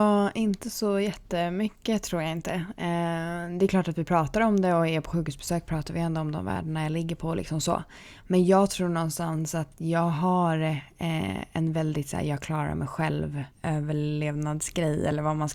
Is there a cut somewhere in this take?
no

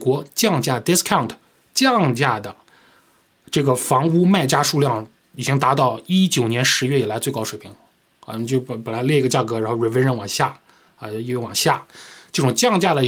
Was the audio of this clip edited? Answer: no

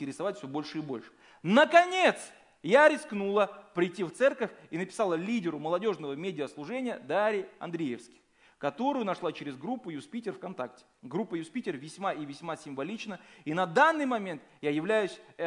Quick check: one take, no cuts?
no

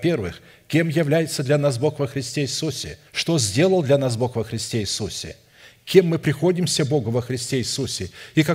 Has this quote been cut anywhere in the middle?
yes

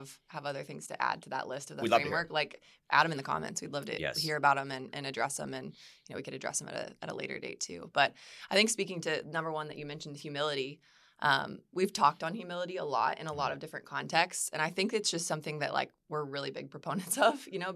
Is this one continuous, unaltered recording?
yes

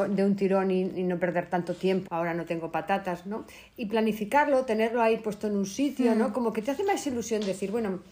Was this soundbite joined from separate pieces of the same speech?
yes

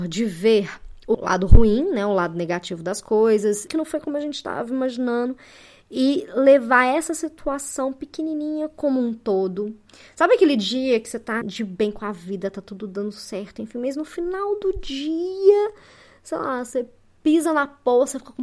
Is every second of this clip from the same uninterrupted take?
no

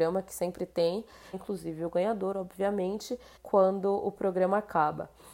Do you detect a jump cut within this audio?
yes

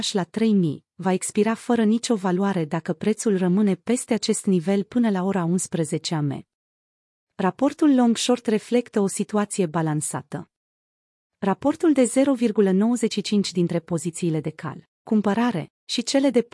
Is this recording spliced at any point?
no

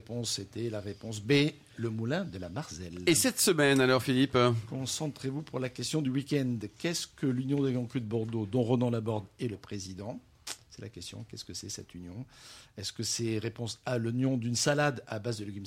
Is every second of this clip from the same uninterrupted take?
yes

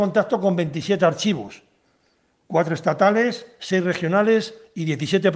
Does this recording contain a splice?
no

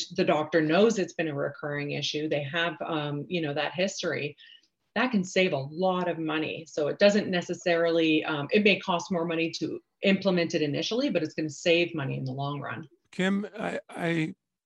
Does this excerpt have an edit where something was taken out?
no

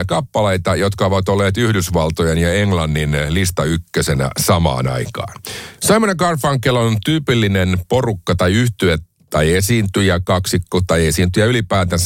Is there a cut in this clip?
yes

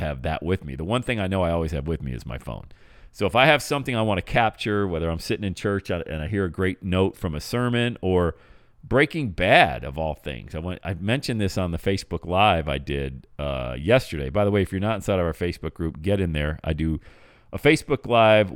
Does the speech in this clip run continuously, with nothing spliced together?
yes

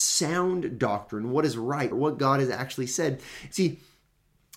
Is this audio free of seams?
no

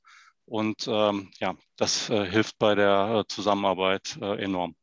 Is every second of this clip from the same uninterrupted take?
yes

